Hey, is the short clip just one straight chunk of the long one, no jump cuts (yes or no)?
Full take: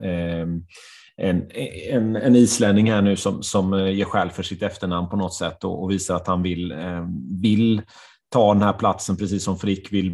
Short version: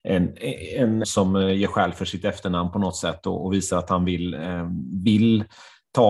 no